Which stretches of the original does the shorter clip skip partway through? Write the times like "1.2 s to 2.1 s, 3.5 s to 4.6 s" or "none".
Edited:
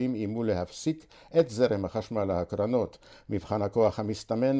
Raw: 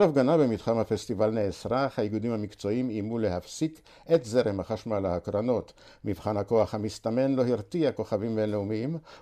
none

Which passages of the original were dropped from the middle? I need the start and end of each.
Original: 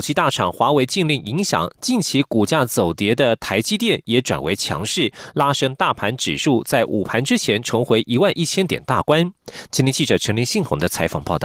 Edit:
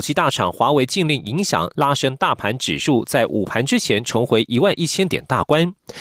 1.7 s to 5.3 s

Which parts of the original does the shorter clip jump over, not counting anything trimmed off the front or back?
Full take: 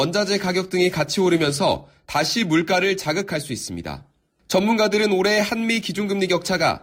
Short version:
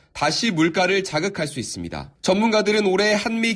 4.1 s to 4.4 s

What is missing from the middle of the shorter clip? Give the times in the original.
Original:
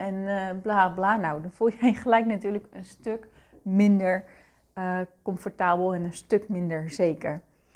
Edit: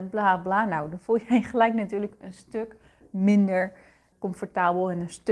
4.6 s to 5.2 s

